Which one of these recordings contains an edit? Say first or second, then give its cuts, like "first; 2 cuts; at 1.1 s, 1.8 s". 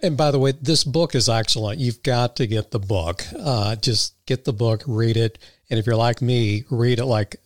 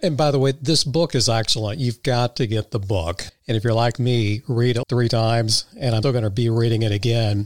second; 3 cuts; at 3.3 s, 4.8 s, 6.0 s